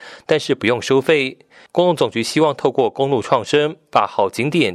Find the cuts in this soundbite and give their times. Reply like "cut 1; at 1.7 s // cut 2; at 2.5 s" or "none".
cut 1; at 1.7 s